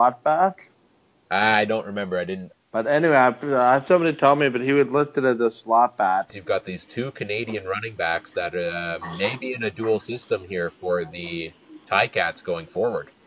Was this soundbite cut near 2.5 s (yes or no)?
yes